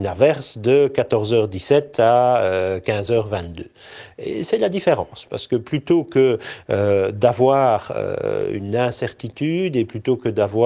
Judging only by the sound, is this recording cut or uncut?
uncut